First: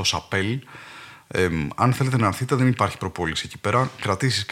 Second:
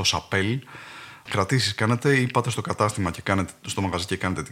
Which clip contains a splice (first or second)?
second